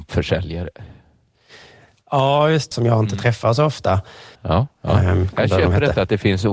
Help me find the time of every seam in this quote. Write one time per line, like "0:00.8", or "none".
0:02.7
0:04.4